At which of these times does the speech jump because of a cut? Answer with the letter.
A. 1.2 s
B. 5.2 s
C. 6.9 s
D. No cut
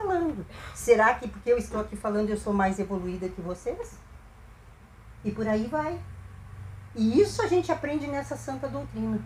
B